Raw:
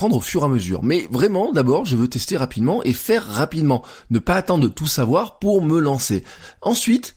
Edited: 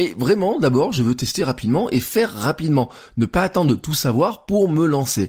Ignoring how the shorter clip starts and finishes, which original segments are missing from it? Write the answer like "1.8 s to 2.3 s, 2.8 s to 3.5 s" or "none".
none

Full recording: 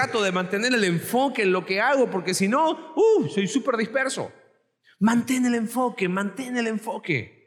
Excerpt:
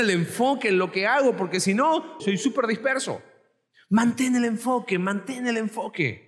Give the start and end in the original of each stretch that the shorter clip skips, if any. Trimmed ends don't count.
2.9 s to 3.3 s

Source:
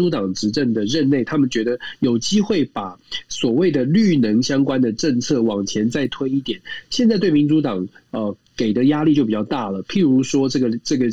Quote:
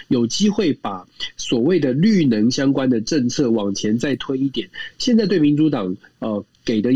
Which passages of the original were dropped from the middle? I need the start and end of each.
none

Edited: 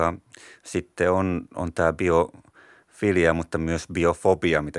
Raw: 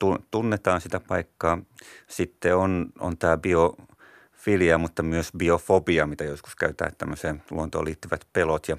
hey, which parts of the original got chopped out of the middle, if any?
none

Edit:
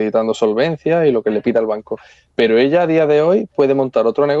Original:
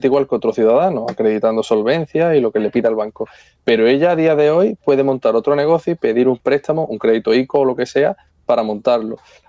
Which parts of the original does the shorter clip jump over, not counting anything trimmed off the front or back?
none

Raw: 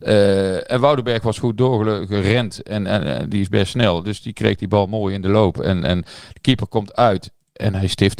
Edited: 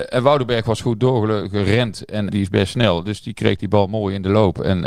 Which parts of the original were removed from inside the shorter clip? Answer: 2.9 s to 3.3 s

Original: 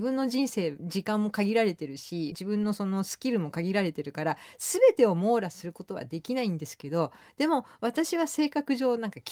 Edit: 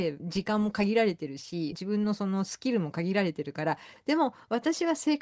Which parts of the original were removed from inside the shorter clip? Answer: 4.6 s to 7.3 s

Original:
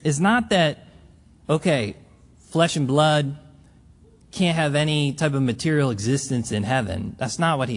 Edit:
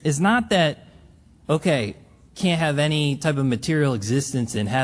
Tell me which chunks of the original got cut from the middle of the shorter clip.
2.3 s to 4.2 s

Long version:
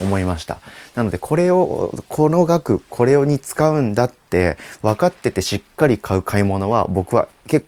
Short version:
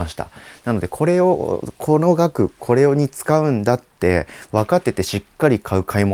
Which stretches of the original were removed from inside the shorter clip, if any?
5.1 s to 5.2 s

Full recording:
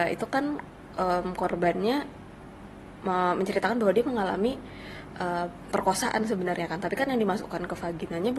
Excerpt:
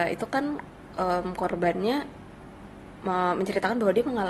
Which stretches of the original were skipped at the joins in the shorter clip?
none

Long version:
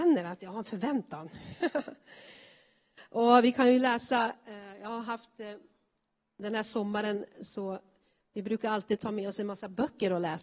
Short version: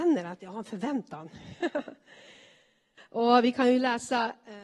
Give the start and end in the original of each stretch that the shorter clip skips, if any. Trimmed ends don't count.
none

